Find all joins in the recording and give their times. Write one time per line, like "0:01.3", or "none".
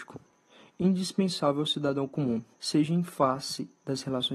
0:02.5